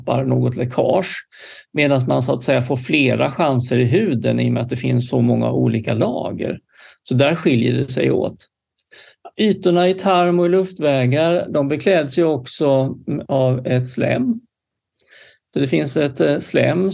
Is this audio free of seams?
yes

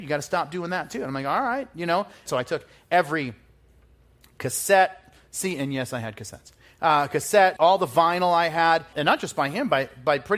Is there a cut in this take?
yes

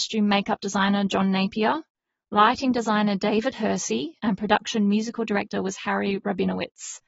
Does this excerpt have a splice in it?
yes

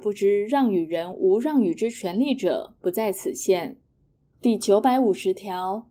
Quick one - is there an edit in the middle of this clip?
yes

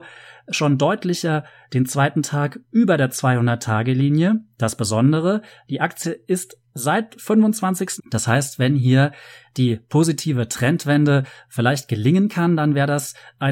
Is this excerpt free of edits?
no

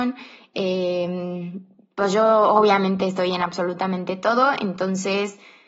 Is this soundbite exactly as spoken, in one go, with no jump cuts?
yes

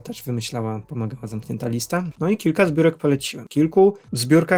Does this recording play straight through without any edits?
no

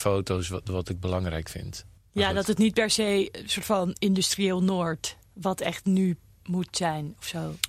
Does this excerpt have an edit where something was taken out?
yes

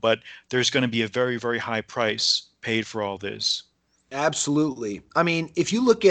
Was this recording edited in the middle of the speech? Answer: no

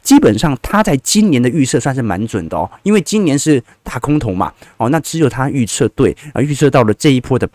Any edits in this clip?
no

